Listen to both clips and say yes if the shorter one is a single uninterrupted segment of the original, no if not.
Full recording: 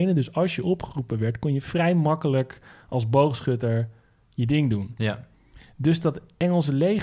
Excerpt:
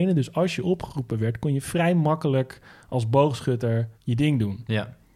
no